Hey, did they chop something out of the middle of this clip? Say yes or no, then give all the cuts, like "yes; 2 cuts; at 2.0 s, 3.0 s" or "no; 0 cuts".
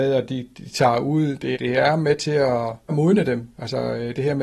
yes; 2 cuts; at 1.5 s, 2.9 s